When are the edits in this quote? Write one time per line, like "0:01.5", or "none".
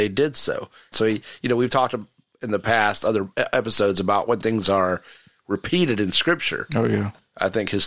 0:00.9
0:06.7